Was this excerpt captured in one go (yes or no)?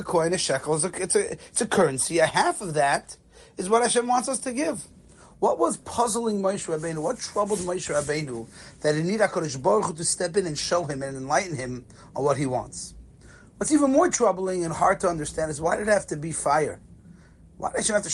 yes